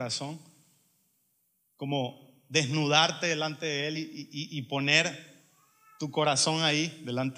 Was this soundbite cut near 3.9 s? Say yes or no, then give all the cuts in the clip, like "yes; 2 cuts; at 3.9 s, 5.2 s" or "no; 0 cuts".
no; 0 cuts